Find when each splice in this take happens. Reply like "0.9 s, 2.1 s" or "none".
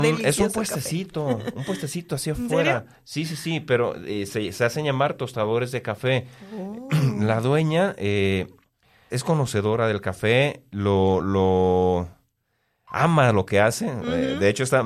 9.1 s